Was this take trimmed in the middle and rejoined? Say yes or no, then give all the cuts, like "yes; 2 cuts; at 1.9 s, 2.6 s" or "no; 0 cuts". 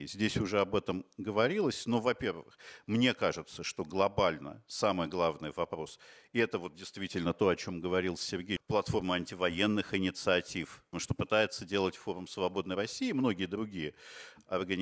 yes; 2 cuts; at 8.6 s, 10.9 s